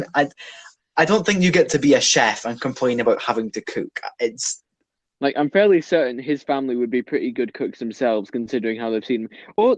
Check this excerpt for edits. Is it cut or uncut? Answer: uncut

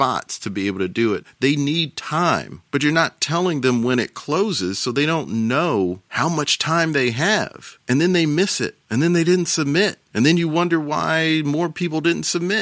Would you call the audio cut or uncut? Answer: uncut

